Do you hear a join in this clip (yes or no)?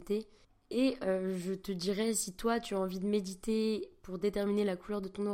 no